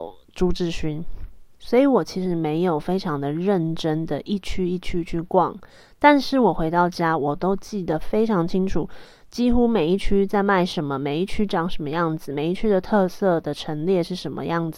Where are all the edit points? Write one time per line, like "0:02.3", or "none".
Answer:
none